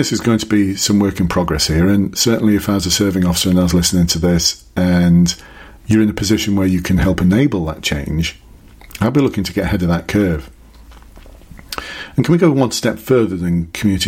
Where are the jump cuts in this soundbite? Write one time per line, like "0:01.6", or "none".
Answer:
none